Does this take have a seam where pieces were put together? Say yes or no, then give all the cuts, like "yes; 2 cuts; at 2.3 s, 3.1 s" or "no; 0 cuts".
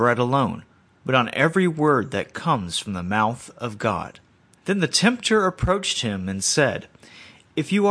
yes; 1 cut; at 4.6 s